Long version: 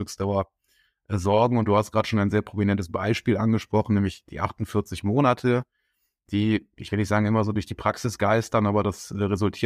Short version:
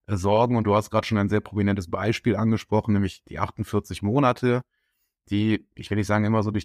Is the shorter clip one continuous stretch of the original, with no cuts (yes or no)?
yes